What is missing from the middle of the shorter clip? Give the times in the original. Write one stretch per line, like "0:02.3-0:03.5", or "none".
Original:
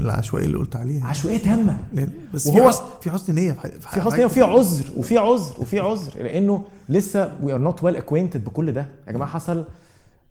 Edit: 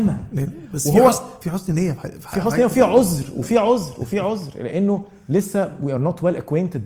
none